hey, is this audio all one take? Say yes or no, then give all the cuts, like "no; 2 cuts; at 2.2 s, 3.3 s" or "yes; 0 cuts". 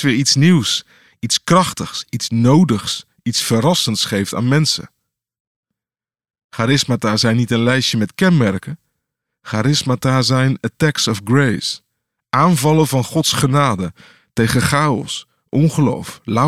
yes; 0 cuts